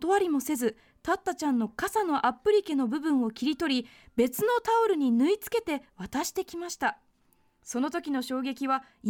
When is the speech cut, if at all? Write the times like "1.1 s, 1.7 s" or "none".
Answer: none